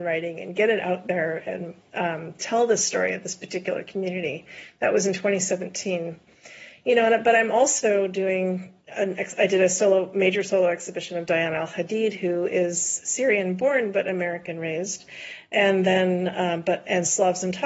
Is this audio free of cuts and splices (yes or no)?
yes